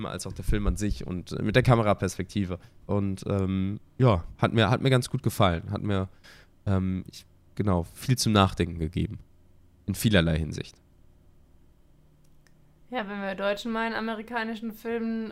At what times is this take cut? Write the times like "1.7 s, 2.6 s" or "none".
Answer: 2.8 s